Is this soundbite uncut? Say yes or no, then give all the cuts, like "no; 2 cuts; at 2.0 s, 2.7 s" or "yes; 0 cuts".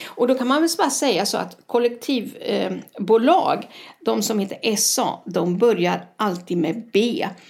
yes; 0 cuts